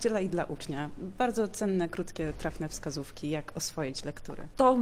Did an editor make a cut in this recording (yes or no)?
no